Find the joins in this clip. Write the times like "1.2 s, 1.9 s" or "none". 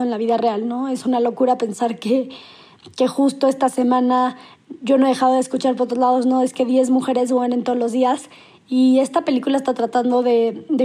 none